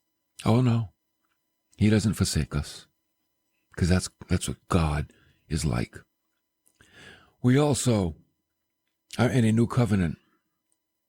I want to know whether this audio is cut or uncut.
uncut